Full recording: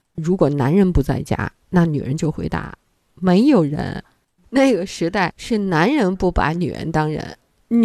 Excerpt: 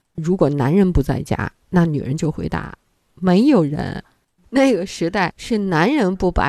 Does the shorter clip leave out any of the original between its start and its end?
no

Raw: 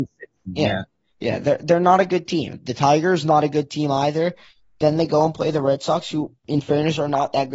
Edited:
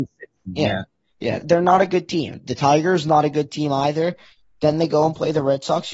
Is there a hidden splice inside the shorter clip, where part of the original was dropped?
yes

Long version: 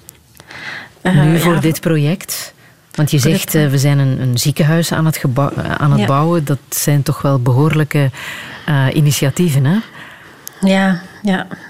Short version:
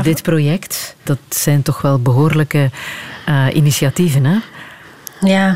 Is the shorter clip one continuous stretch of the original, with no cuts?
no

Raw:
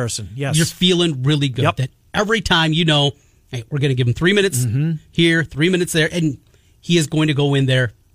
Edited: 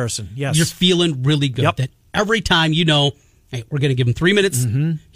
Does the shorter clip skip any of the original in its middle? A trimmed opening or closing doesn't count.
no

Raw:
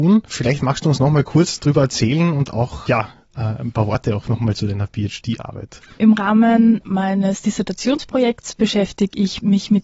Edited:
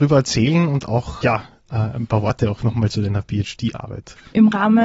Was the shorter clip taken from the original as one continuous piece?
yes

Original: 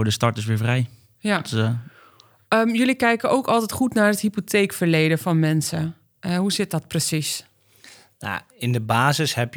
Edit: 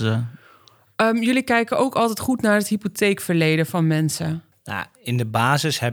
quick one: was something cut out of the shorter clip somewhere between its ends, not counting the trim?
yes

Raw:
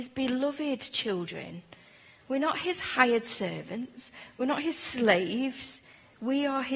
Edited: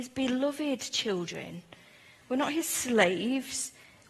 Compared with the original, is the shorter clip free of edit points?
no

